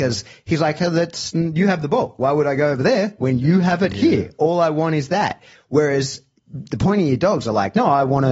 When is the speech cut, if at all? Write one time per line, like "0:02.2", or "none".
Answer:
none